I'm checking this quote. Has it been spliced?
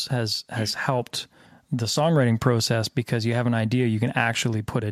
no; 0 cuts

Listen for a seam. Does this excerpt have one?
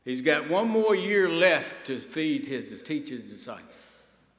yes; 1 cut; at 2.8 s

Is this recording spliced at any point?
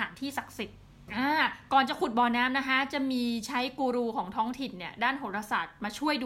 yes; 1 cut; at 1.1 s

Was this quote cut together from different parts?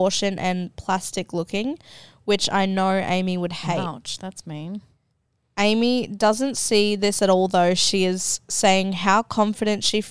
no; 0 cuts

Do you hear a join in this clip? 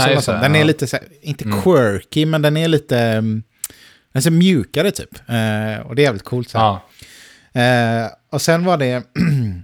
no; 0 cuts

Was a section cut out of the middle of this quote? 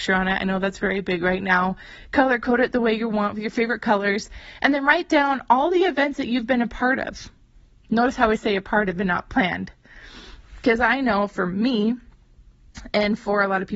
no; 0 cuts

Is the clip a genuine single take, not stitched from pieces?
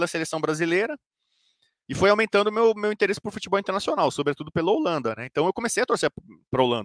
yes; 0 cuts

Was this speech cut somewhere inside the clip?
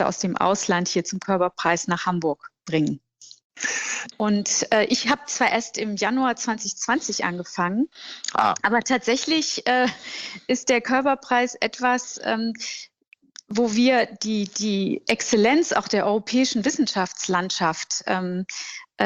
yes; 1 cut; at 4.1 s

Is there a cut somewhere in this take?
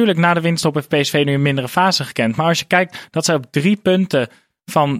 no; 0 cuts

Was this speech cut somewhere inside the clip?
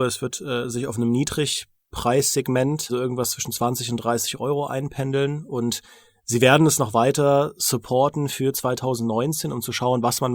yes; 1 cut; at 2.9 s

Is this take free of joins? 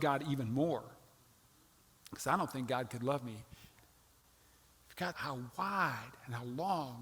no; 3 cuts; at 2.0 s, 3.8 s, 5.1 s

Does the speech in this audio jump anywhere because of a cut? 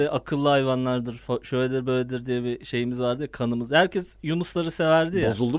no; 0 cuts

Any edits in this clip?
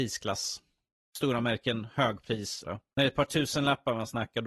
yes; 1 cut; at 2.6 s

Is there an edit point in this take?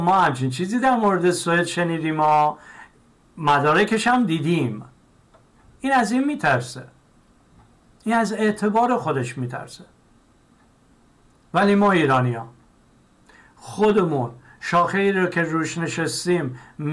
no; 0 cuts

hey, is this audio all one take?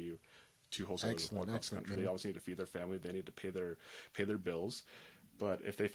no; 1 cut; at 1.9 s

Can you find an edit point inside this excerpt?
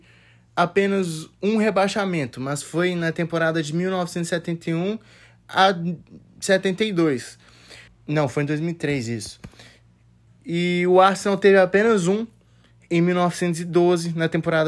yes; 2 cuts; at 7.9 s, 10.3 s

